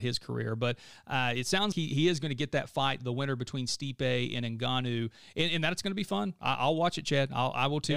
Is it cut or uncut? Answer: cut